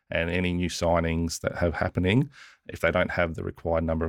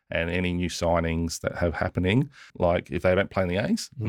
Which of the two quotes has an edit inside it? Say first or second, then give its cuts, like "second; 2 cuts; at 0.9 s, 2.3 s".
second; 1 cut; at 2.5 s